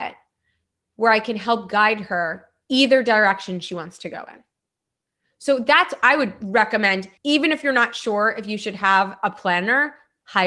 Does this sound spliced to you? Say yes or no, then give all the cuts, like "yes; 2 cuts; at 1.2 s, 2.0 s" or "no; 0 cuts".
yes; 1 cut; at 7.2 s